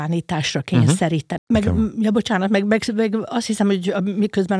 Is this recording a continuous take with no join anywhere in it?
no; 1 cut; at 1.4 s

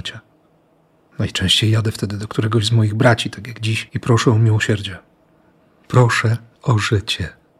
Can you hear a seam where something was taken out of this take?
yes; 1 cut; at 3.9 s

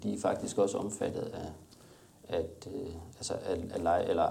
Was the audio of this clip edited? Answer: no; 0 cuts

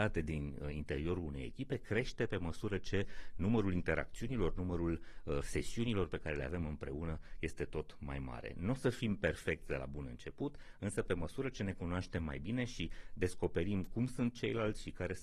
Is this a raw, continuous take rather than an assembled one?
yes; 0 cuts

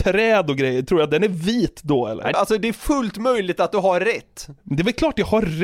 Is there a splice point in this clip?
yes; 1 cut; at 2.3 s

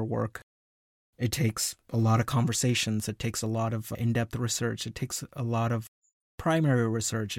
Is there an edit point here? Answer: no; 0 cuts

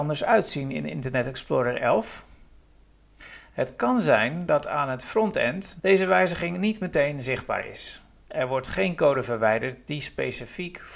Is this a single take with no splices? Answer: no; 1 cut; at 5.8 s

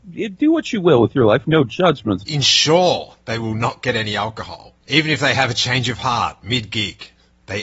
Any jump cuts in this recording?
yes; 2 cuts; at 2.2 s, 4.8 s

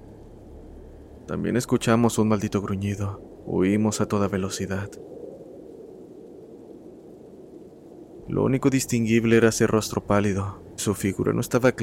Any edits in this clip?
yes; 3 cuts; at 3.4 s, 8.2 s, 10.8 s

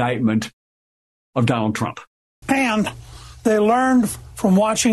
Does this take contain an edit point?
yes; 1 cut; at 2.4 s

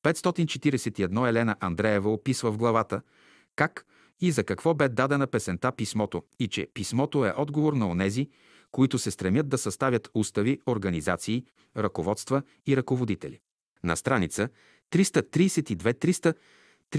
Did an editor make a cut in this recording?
no; 0 cuts

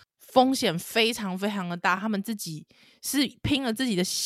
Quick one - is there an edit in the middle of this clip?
no; 0 cuts

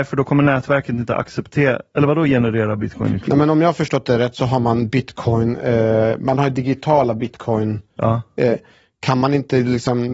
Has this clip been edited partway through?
no; 0 cuts

